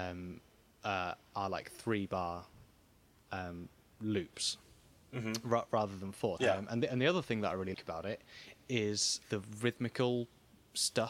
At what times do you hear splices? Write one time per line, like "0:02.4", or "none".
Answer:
0:06.4
0:07.7
0:09.2